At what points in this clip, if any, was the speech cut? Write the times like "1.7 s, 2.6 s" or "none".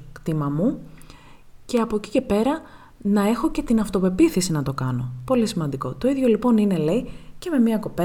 none